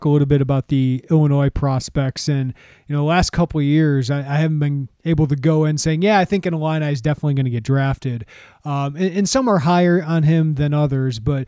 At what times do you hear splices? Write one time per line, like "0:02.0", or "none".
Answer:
none

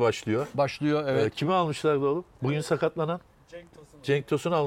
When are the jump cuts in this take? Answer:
0:02.3

